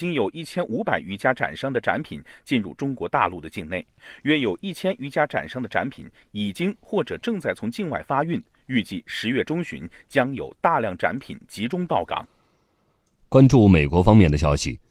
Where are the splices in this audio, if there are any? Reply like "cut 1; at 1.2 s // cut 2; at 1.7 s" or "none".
none